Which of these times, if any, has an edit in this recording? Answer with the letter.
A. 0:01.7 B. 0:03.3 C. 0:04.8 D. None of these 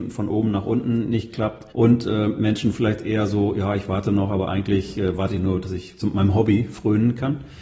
A